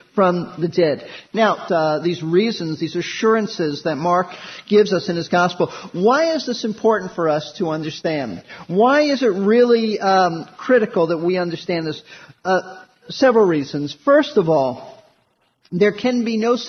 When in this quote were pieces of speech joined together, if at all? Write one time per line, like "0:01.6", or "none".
0:01.7